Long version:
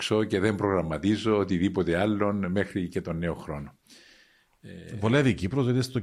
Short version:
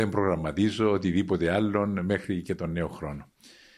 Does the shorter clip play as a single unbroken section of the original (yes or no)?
yes